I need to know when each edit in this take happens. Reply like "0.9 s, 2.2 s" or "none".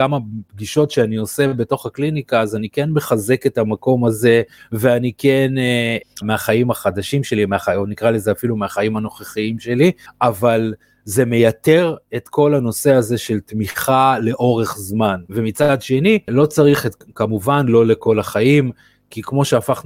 6.2 s, 15.3 s